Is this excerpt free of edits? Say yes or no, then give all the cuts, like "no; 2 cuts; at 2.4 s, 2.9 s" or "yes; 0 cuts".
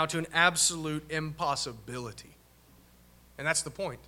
yes; 0 cuts